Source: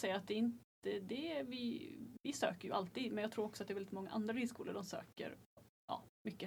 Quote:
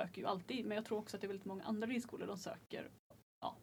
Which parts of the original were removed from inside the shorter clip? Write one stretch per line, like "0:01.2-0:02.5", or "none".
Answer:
none